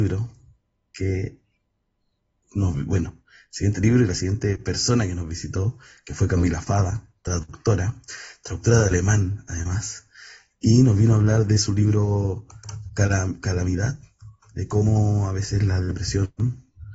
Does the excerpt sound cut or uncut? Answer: cut